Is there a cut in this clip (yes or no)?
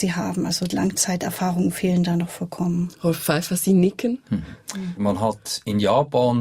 yes